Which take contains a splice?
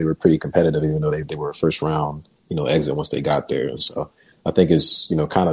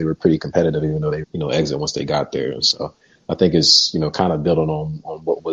second; 1 cut; at 1.2 s

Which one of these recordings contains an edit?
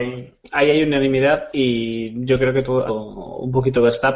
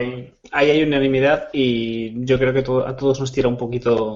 first; 1 cut; at 2.9 s

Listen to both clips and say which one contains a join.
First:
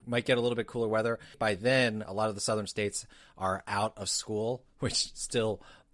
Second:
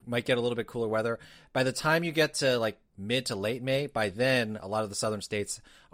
first; 1 cut; at 1.3 s

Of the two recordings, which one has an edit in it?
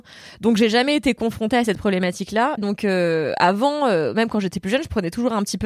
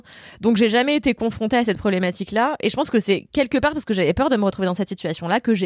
first; 1 cut; at 2.6 s

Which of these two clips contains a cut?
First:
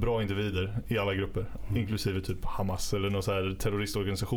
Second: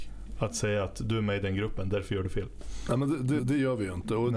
second; 1 cut; at 3.4 s

